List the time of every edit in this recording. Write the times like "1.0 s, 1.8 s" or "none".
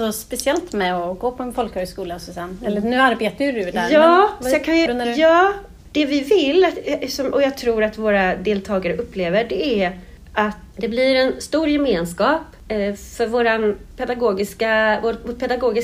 4.9 s, 10.7 s